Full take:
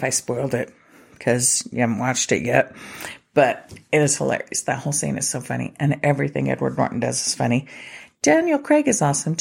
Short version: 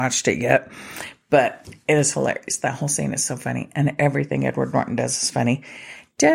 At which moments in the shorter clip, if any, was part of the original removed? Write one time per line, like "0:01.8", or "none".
none